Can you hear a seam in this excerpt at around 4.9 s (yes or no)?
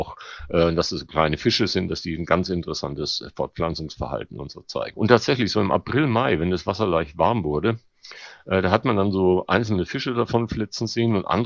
yes